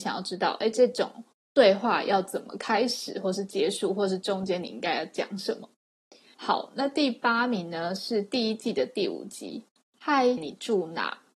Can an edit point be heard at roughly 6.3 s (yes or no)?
yes